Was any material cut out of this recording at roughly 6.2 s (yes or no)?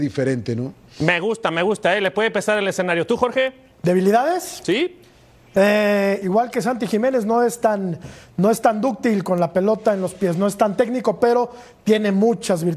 yes